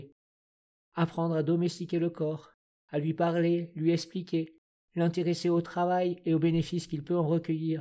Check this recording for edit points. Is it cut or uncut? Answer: uncut